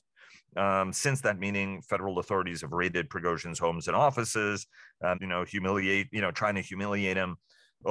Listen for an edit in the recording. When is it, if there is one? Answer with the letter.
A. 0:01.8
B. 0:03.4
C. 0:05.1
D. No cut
C